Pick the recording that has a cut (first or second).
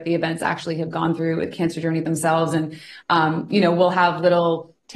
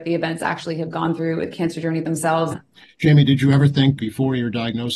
second